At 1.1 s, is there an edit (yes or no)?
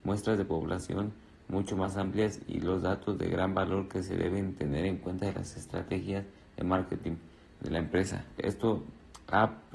no